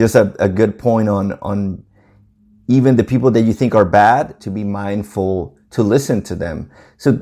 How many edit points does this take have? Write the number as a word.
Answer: one